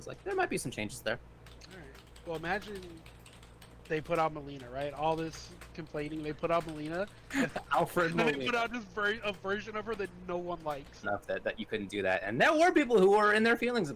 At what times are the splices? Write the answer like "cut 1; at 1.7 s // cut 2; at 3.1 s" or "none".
cut 1; at 11.0 s